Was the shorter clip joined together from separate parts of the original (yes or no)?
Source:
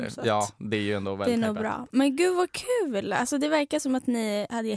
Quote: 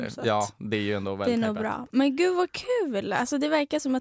no